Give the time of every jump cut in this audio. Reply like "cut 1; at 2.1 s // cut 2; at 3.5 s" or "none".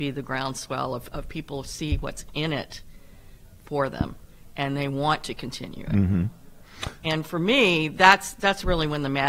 cut 1; at 7.0 s